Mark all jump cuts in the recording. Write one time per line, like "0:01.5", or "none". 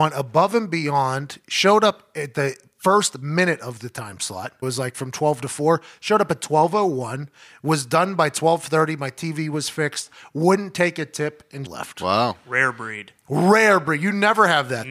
0:04.6
0:11.7